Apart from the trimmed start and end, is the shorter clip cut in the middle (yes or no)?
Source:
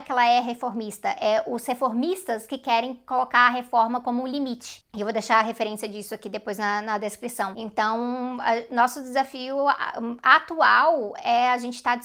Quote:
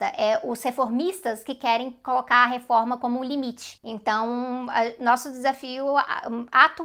yes